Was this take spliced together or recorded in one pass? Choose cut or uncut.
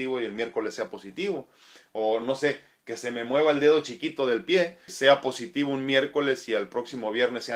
cut